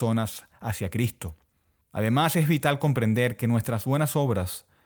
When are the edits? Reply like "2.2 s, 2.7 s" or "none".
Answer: 1.8 s